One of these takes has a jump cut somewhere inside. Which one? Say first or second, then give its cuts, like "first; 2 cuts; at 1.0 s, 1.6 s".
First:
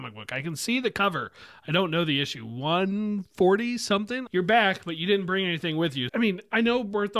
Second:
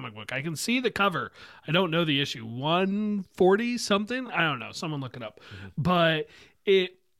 first; 2 cuts; at 4.3 s, 6.1 s